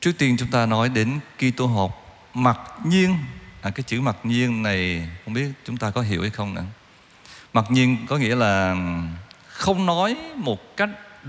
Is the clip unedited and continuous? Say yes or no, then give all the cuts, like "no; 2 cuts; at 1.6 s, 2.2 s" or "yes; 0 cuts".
yes; 0 cuts